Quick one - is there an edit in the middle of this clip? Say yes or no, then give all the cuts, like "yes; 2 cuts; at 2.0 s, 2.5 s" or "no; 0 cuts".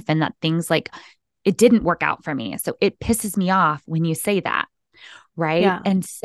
no; 0 cuts